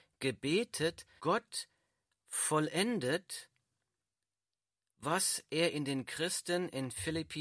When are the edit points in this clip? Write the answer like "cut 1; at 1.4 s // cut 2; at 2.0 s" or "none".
cut 1; at 1.2 s